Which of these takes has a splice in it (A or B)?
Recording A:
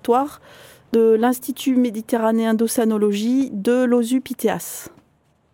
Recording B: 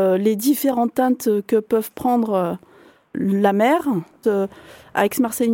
B